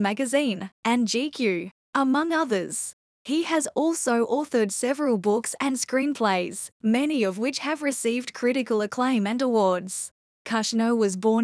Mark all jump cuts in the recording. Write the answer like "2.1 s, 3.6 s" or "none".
none